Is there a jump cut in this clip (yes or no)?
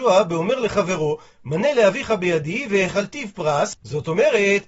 no